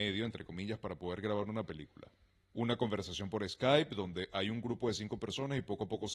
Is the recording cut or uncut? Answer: uncut